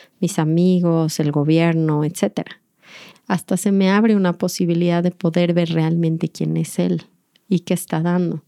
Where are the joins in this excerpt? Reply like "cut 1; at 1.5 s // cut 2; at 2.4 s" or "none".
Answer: cut 1; at 3.1 s